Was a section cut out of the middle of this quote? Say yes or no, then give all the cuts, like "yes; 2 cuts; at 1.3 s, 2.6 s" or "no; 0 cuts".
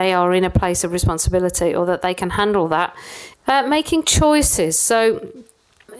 yes; 1 cut; at 3.3 s